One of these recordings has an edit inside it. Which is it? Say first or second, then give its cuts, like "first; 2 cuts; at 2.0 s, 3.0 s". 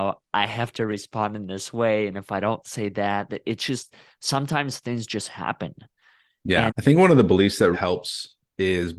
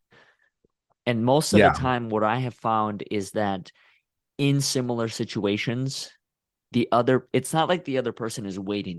first; 2 cuts; at 6.7 s, 7.7 s